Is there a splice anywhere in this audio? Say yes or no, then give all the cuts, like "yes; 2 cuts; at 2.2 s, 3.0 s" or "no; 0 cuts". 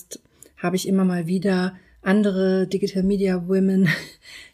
no; 0 cuts